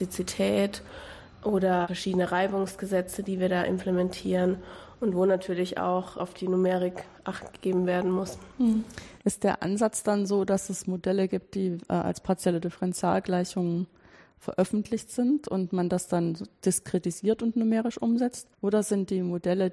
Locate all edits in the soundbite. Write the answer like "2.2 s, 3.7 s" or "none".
18.5 s

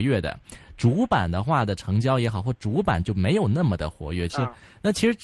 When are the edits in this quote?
4.3 s

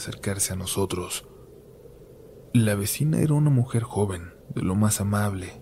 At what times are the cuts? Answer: none

